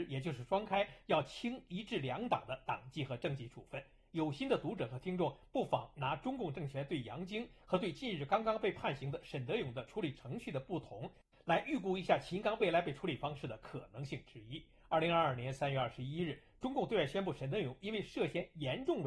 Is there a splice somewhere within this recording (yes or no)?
no